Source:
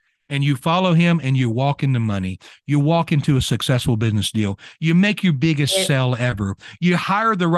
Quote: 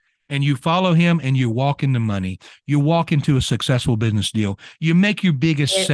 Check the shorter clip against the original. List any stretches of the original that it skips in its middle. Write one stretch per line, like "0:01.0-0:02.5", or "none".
none